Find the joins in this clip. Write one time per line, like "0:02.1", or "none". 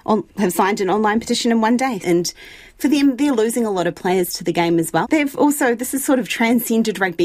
0:02.0
0:05.0